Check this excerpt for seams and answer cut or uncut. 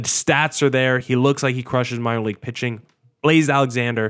uncut